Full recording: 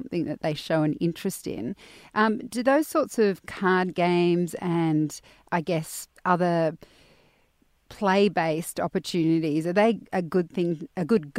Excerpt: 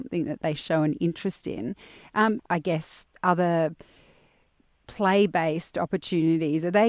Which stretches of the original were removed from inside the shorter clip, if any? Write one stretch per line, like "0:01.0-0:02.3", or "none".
0:02.4-0:05.4